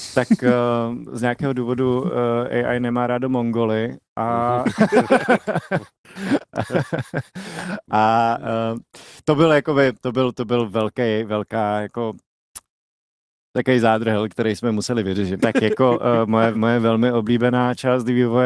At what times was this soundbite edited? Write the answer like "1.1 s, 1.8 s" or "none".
15.4 s, 16.5 s

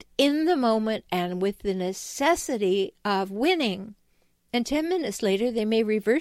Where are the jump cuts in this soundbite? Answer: 1.0 s, 4.5 s

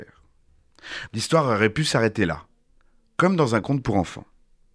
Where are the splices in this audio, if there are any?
1.1 s

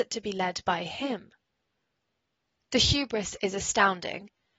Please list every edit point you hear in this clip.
none

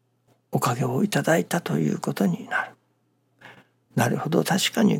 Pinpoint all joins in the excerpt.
none

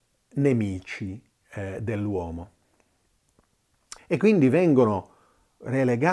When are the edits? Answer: 4.0 s

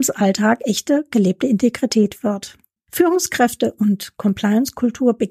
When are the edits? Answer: 2.8 s

